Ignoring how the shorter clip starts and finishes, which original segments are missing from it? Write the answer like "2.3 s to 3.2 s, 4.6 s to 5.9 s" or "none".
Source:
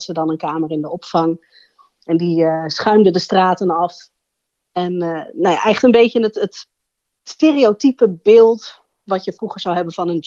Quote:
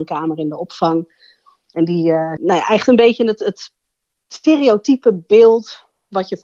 2.7 s to 5.3 s